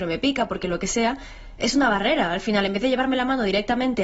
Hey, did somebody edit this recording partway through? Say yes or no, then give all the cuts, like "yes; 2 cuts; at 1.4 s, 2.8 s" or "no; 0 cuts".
no; 0 cuts